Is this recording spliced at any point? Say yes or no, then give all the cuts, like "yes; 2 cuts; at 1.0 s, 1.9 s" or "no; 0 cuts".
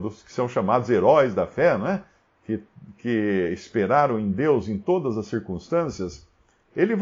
no; 0 cuts